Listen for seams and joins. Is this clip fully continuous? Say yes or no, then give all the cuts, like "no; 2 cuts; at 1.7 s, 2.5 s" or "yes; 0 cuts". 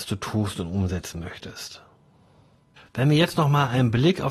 yes; 0 cuts